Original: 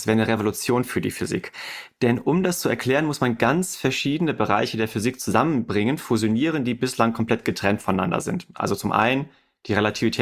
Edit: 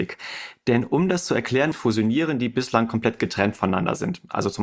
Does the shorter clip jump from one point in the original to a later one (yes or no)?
yes